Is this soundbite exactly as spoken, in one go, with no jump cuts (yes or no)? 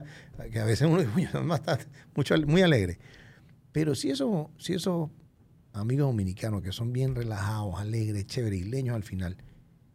yes